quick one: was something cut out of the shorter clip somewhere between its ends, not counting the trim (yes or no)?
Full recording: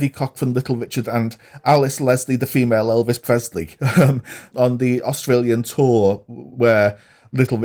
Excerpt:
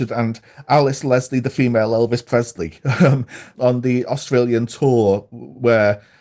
no